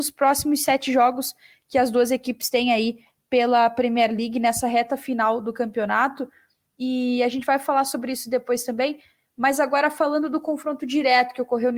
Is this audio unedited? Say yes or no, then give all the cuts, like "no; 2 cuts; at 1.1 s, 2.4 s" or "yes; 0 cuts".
yes; 0 cuts